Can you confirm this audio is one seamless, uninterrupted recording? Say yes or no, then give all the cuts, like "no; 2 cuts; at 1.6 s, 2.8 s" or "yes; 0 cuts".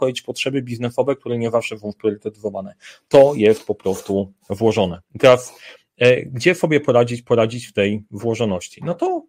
yes; 0 cuts